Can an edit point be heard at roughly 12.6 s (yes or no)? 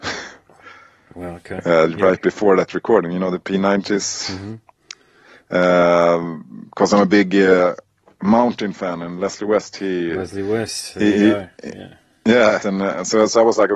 yes